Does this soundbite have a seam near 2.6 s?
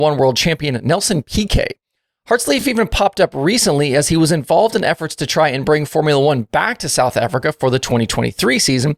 no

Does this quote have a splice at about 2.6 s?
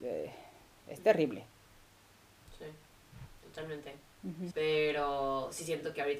no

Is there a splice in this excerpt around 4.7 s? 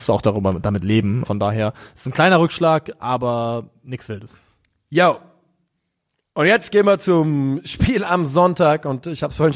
no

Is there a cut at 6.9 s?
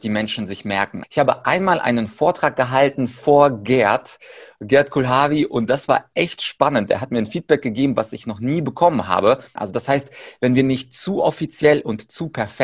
no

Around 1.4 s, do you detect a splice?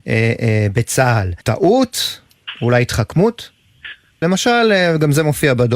yes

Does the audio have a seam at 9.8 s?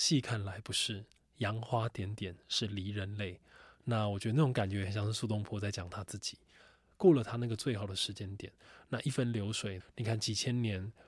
yes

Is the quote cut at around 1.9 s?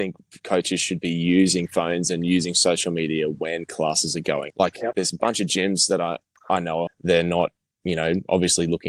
no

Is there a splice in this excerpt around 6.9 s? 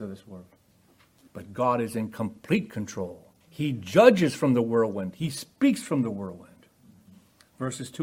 no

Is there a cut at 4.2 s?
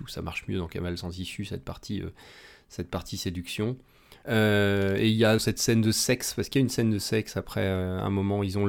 yes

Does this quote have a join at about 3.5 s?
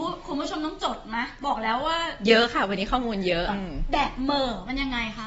yes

